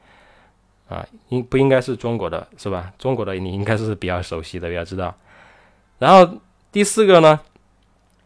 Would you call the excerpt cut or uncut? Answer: uncut